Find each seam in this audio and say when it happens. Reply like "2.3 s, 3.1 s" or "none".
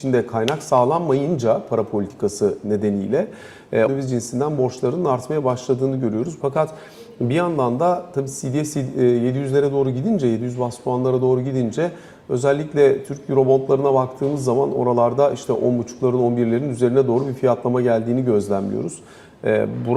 3.9 s, 6.4 s